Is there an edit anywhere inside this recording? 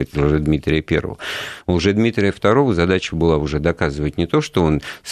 no; 0 cuts

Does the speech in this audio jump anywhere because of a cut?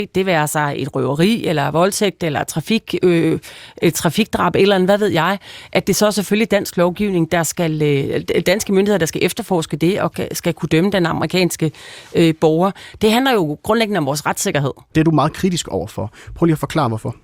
yes; 1 cut; at 14.9 s

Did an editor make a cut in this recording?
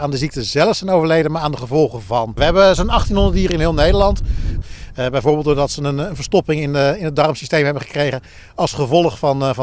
yes; 2 cuts; at 2.4 s, 4.6 s

